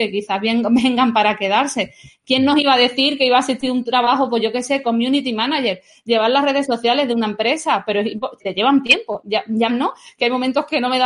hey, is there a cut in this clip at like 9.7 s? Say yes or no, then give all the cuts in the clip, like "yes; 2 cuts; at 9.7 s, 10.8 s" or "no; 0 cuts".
yes; 2 cuts; at 8.4 s, 9.7 s